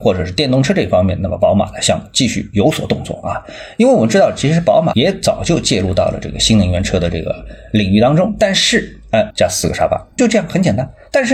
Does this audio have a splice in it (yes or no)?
yes